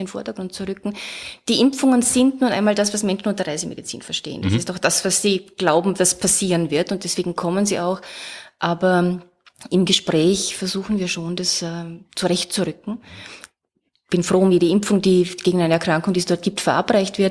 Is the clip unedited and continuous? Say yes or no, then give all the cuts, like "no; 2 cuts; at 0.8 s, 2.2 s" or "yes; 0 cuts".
yes; 0 cuts